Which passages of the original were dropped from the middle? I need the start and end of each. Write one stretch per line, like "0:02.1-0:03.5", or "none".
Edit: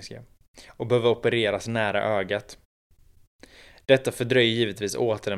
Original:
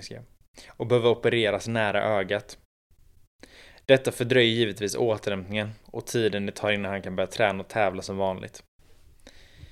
none